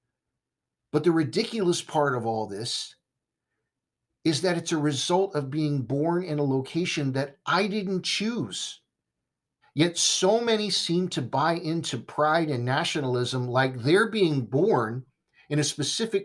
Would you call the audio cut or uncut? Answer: cut